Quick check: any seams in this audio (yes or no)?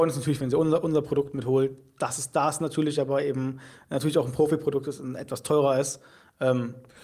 no